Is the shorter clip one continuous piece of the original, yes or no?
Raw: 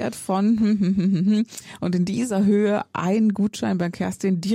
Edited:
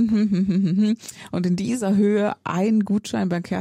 yes